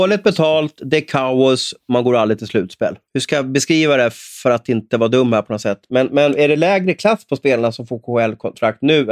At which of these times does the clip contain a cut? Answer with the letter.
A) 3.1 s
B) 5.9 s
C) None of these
A